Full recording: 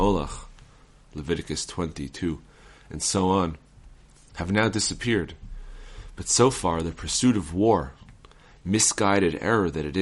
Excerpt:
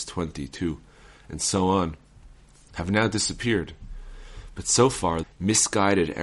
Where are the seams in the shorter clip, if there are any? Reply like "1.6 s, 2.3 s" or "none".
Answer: 5.2 s